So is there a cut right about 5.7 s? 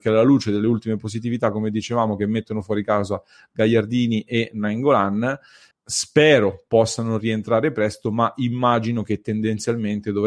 yes; 1 cut; at 5.7 s

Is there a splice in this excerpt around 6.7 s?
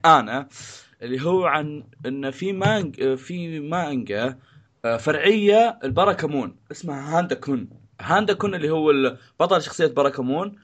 yes; 1 cut; at 6.7 s

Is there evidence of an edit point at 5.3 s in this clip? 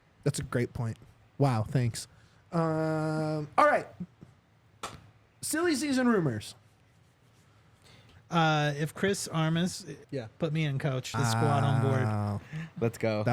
no; 3 cuts; at 8.2 s, 10.0 s, 11.1 s

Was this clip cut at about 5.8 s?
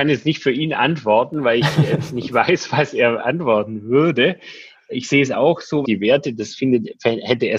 yes; 1 cut; at 5.8 s

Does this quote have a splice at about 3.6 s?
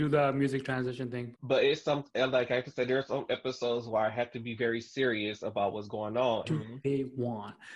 no; 2 cuts; at 1.3 s, 6.4 s

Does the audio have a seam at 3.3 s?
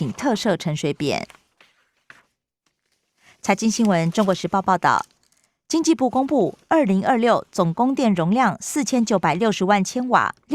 no; 0 cuts

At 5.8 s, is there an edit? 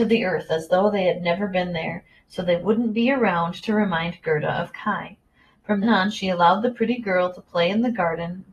yes; 1 cut; at 5.8 s

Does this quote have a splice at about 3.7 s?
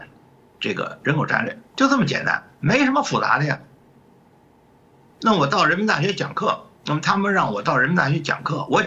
no; 2 cuts; at 1.7 s, 6.8 s

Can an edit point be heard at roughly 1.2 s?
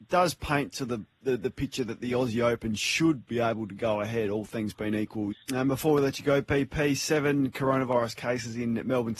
no; 1 cut; at 5.3 s

